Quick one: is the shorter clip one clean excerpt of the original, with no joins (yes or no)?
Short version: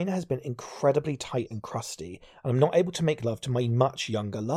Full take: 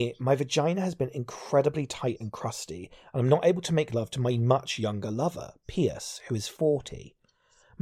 yes